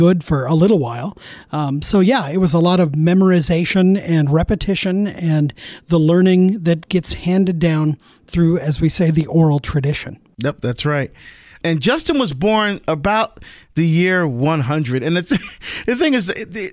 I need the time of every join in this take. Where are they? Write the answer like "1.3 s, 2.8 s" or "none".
none